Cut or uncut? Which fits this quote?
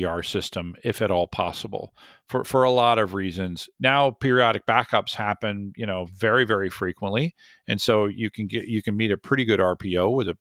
cut